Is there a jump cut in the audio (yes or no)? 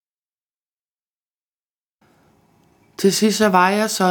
no